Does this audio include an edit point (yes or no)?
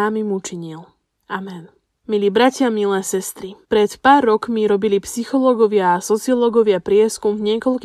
yes